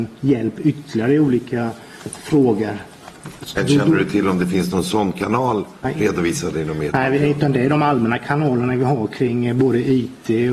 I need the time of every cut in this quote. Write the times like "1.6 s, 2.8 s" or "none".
2.1 s